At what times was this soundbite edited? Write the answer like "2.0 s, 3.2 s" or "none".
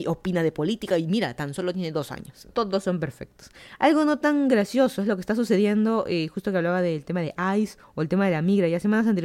2.5 s